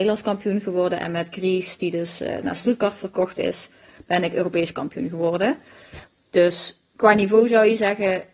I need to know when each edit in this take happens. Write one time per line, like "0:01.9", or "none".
none

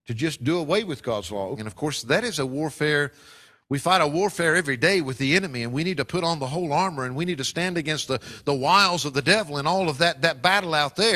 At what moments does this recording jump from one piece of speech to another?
0:01.6

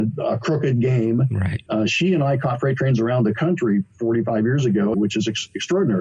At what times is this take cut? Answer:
0:01.7
0:04.9

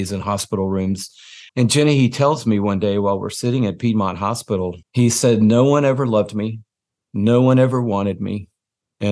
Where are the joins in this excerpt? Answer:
0:01.5
0:04.8

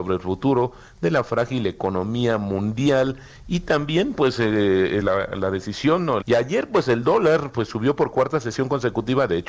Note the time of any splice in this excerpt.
0:05.0
0:06.2

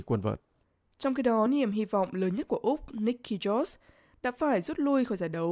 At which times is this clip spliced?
none

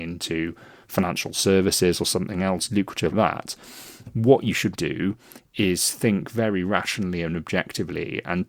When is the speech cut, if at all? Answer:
0:03.1
0:04.7

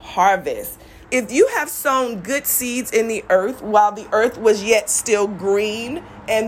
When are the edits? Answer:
0:01.0

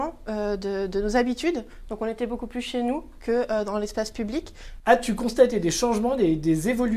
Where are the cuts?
0:04.8

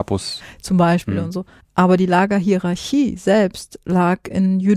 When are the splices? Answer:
0:01.6

